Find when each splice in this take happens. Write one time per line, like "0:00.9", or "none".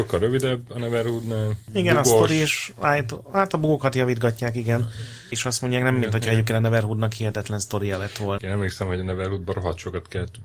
0:05.3
0:08.4